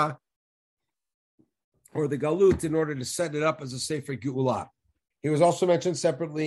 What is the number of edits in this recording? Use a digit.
1